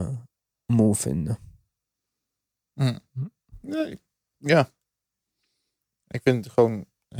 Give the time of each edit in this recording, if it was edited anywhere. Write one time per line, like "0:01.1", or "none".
none